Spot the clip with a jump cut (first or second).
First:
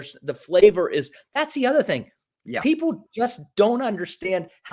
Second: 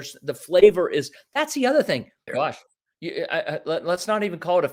second